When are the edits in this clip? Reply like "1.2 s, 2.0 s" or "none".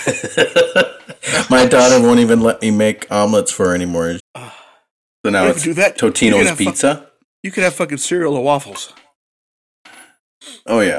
4.2 s